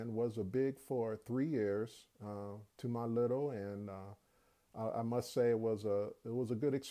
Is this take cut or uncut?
uncut